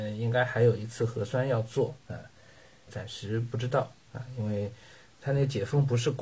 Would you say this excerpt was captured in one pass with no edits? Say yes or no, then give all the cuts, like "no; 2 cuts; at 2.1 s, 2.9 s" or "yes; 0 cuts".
no; 1 cut; at 2.9 s